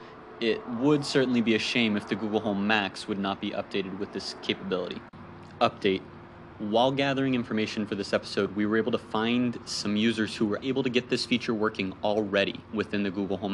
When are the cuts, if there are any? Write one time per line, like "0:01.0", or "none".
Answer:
0:10.6